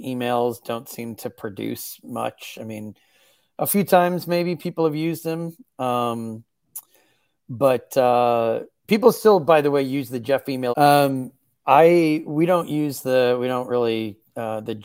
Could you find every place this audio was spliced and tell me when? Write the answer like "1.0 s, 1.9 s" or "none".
10.7 s, 12.2 s